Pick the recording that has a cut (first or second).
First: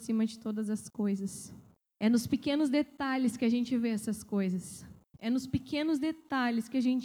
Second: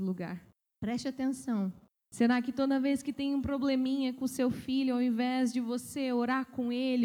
second